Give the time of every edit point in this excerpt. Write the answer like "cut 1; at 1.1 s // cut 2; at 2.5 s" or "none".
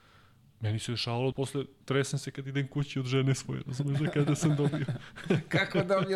cut 1; at 1.3 s